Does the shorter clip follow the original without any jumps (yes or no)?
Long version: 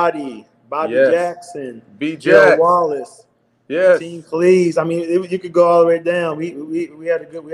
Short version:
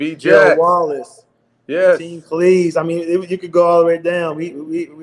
yes